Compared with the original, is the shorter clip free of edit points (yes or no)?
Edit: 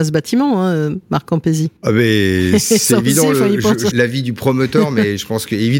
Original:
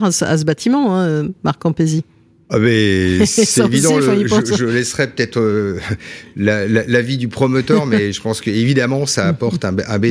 no